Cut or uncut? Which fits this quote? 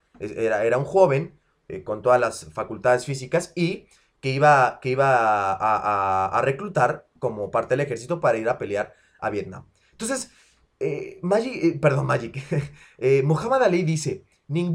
uncut